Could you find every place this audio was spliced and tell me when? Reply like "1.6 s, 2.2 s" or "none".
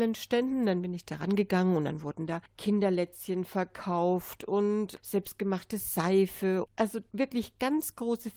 none